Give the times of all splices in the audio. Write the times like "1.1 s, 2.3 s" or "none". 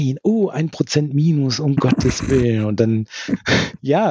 none